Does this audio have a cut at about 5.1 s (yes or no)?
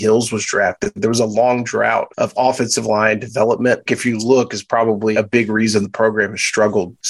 yes